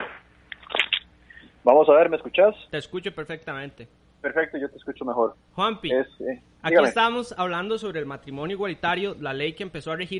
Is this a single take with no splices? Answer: yes; 0 cuts

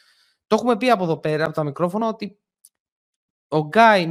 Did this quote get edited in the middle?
no; 0 cuts

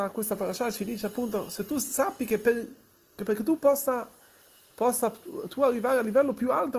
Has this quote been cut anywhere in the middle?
no; 0 cuts

